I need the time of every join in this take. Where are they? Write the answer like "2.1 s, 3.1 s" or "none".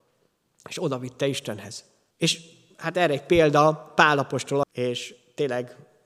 2.1 s, 4.6 s